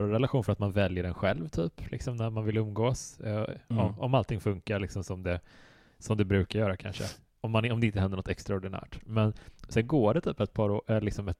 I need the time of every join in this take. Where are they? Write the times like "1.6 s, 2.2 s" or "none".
none